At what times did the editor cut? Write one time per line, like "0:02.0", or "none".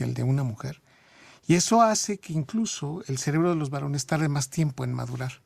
none